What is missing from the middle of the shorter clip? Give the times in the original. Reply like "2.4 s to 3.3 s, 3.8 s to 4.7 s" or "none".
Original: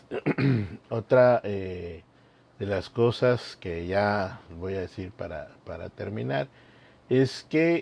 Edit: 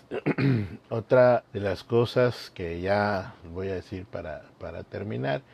1.4 s to 2.5 s